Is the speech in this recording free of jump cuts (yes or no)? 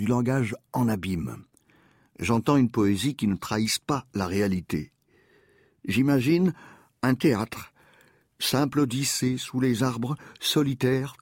yes